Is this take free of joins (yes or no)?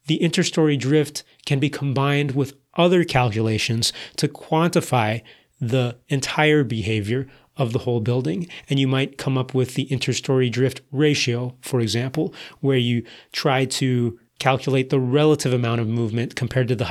no